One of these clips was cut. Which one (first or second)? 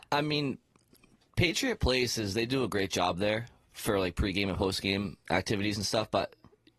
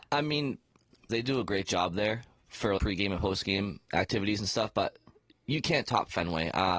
second